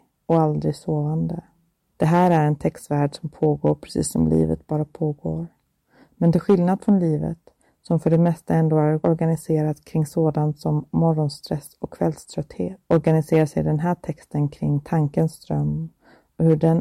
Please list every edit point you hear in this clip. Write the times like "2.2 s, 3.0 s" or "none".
1.9 s, 12.8 s